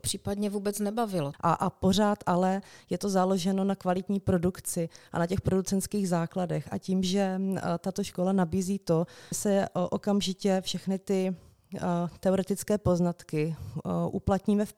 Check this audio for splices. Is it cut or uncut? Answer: cut